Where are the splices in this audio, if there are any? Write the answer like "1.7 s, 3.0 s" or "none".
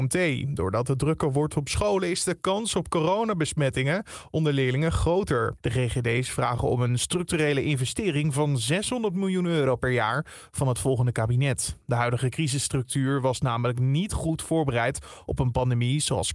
5.6 s